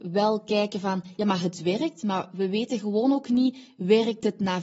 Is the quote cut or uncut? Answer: uncut